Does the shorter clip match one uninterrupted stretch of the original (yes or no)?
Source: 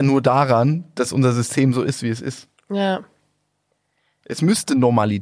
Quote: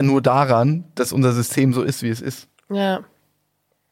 yes